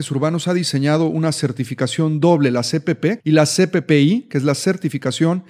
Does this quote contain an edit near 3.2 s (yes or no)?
yes